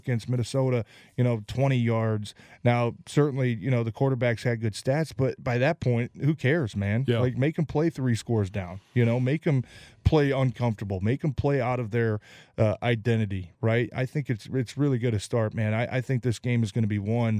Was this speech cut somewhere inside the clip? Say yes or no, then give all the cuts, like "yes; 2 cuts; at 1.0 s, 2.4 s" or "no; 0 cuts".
no; 0 cuts